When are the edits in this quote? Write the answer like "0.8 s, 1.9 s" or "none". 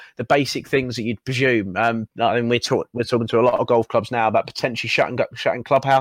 2.1 s